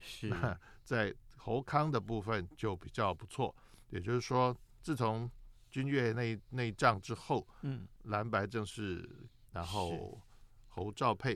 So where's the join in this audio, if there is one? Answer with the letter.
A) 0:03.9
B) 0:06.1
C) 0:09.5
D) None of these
C